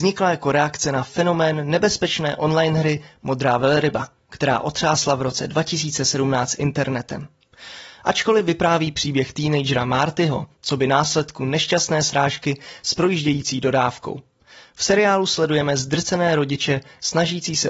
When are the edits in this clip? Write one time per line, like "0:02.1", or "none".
0:10.6